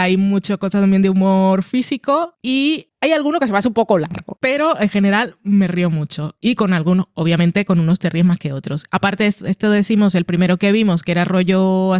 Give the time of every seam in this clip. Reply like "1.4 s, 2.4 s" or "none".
4.4 s